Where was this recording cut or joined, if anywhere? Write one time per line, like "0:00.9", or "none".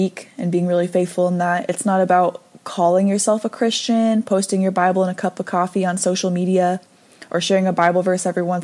none